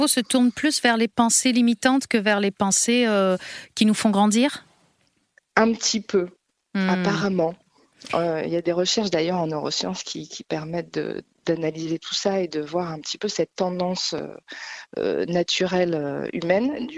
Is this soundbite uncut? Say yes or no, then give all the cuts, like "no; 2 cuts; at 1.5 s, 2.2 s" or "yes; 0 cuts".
yes; 0 cuts